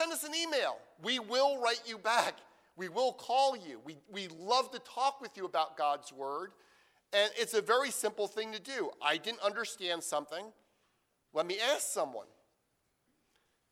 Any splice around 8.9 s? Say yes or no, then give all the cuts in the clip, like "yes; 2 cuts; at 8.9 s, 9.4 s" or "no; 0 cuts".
no; 0 cuts